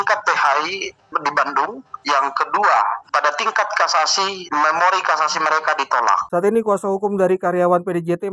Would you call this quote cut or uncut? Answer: uncut